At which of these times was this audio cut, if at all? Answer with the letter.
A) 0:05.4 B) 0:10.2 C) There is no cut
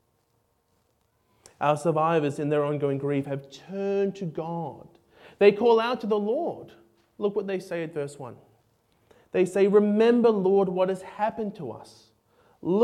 C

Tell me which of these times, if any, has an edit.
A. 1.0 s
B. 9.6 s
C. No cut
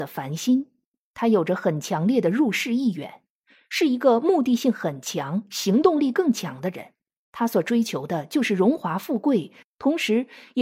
B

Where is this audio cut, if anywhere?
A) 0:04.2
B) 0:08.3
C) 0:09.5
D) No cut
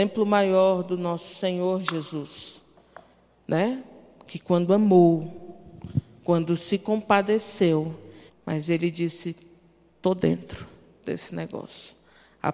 B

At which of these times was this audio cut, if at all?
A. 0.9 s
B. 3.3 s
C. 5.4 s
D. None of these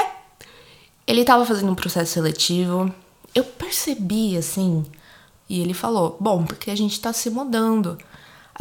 C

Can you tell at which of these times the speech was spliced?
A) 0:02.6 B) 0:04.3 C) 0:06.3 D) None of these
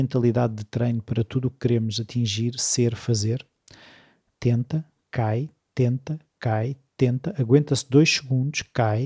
B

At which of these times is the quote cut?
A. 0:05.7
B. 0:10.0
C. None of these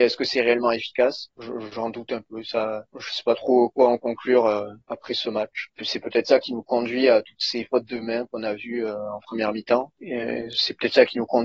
A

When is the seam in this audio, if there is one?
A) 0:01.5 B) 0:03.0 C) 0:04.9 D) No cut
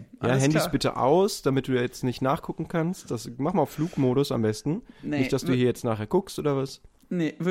D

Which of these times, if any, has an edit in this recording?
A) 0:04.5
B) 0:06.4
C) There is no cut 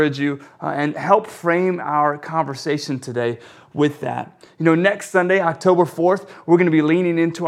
C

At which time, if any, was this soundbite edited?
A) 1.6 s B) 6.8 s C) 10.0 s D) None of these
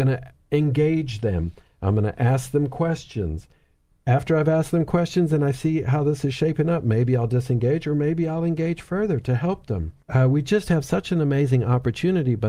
C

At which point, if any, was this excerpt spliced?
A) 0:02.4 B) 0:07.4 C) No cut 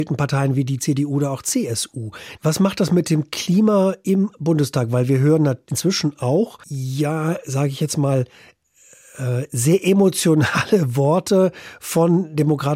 A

